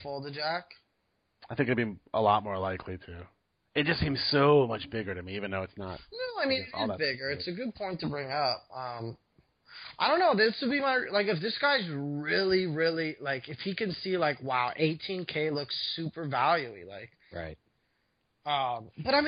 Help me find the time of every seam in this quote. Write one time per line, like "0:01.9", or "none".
none